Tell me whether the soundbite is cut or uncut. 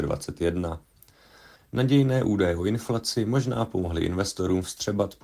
cut